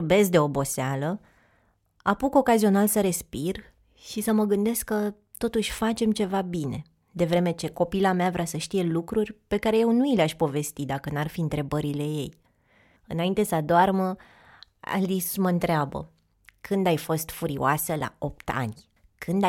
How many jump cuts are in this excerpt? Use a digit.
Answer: 0